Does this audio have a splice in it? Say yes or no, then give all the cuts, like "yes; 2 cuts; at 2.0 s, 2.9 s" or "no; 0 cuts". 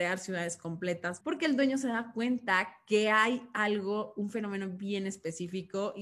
yes; 1 cut; at 1.2 s